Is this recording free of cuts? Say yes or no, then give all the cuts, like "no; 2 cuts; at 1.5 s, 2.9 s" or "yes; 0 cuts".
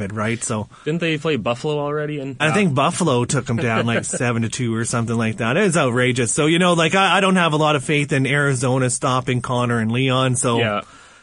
no; 1 cut; at 2.4 s